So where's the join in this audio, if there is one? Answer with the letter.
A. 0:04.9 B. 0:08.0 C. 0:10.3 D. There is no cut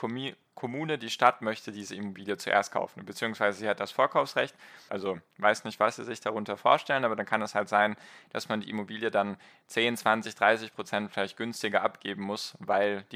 A